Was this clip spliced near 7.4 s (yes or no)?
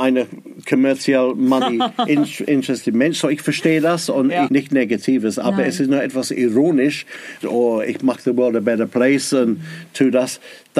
yes